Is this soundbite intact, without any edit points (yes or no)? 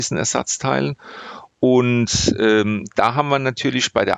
yes